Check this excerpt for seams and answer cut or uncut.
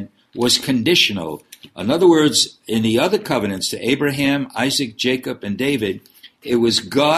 uncut